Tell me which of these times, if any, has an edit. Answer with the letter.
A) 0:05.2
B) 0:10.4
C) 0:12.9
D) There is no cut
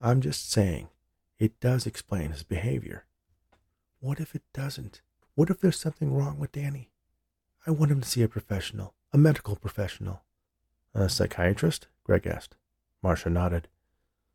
A